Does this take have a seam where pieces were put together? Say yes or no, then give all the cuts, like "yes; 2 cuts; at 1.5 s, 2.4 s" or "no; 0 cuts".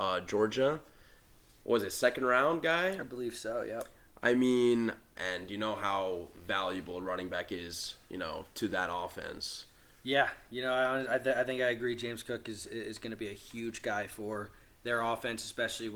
yes; 1 cut; at 5.1 s